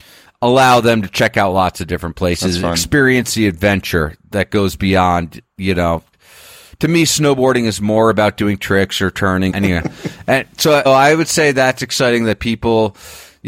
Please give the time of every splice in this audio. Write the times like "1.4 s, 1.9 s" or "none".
9.5 s, 10.8 s

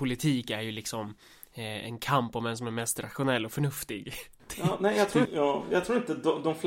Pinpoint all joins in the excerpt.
5.3 s

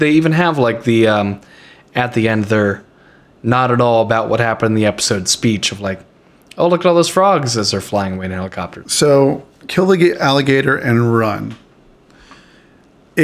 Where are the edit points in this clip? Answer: 8.8 s

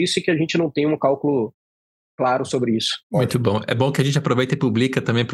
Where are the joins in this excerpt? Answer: 3.0 s

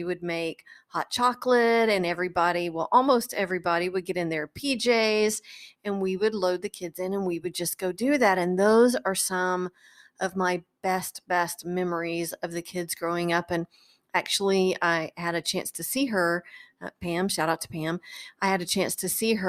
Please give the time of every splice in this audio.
none

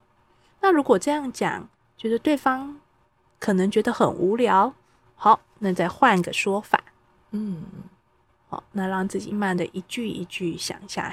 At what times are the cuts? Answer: 9.3 s

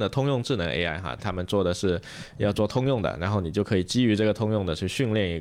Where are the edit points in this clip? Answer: 1.2 s

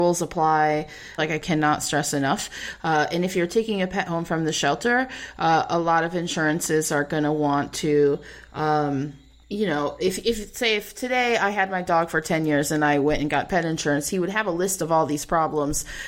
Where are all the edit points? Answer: 1.2 s

